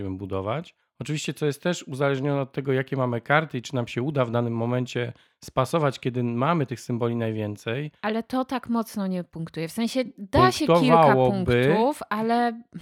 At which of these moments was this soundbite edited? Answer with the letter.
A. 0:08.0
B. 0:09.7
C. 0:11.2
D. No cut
D